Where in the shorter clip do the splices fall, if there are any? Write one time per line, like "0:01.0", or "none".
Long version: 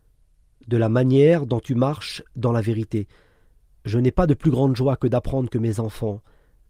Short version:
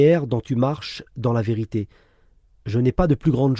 none